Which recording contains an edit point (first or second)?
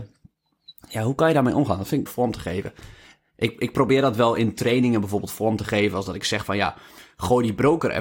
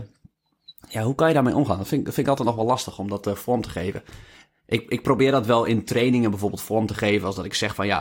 first